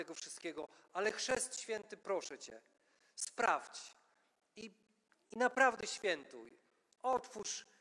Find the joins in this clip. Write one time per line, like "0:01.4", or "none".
none